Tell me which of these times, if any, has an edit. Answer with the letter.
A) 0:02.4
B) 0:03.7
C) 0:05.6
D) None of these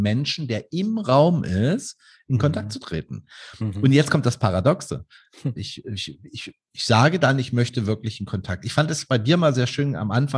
C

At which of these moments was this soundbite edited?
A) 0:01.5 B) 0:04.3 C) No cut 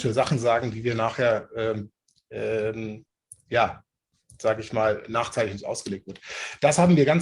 C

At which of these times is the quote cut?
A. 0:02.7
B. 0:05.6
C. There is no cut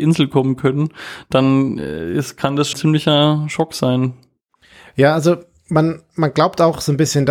A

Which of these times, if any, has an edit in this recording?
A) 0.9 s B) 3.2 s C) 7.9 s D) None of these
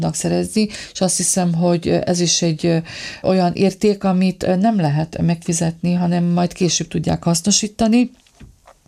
B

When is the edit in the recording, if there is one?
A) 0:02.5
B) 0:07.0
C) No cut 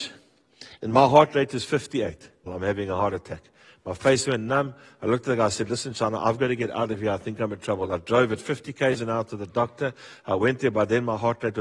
A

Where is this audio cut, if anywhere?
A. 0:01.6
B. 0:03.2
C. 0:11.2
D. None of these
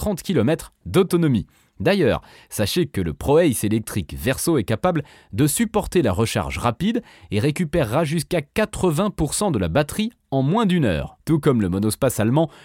C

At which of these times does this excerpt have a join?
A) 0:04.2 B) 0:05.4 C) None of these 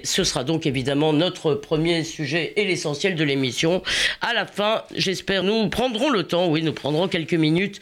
B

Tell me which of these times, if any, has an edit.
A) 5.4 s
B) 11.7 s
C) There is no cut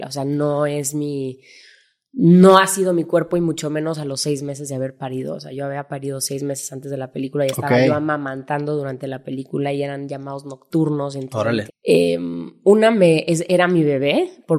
B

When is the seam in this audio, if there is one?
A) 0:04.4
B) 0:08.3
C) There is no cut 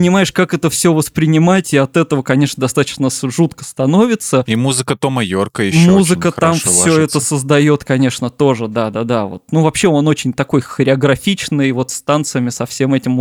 C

